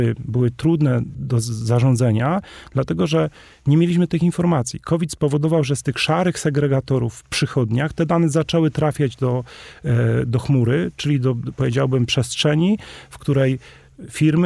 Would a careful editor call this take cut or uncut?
uncut